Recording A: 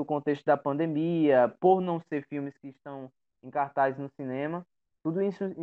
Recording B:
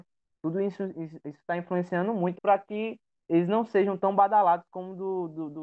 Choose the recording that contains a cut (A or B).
B